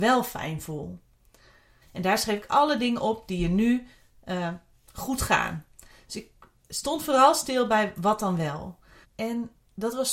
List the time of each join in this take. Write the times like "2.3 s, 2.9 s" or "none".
1.8 s, 9.0 s